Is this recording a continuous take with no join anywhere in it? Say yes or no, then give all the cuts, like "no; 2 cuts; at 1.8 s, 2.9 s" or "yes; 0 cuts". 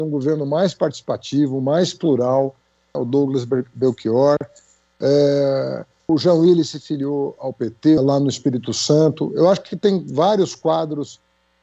no; 3 cuts; at 2.9 s, 6.1 s, 8.0 s